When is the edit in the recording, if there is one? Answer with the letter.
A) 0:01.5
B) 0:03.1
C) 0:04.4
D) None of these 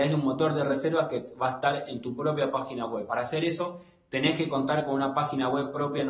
B